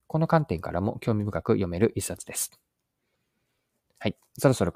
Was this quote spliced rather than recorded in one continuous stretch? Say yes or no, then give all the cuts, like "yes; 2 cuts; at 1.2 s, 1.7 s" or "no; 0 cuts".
no; 0 cuts